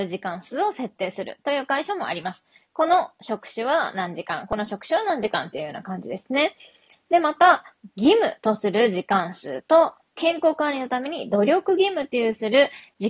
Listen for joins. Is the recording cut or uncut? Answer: uncut